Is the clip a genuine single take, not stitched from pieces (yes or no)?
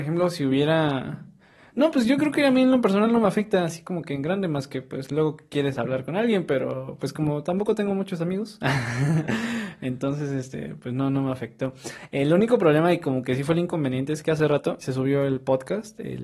no